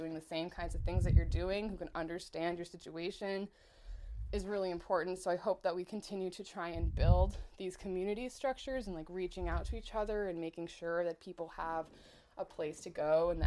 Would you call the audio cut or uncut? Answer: uncut